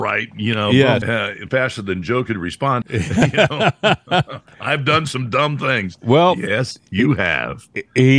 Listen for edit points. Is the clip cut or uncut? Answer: cut